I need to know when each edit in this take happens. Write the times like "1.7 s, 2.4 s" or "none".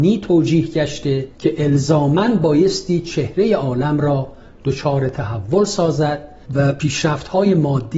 1.3 s, 6.4 s